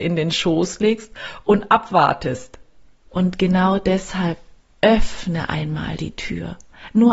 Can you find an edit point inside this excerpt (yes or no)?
yes